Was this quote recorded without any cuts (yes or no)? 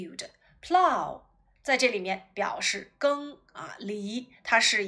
yes